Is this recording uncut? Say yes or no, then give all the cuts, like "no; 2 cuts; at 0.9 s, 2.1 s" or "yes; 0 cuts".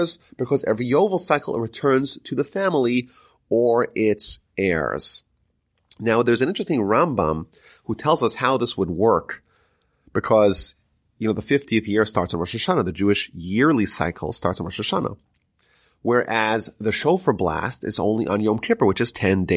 yes; 0 cuts